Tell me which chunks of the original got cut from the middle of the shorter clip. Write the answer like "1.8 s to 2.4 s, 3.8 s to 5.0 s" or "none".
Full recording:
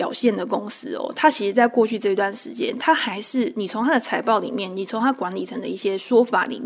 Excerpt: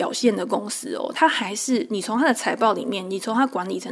1.1 s to 2.8 s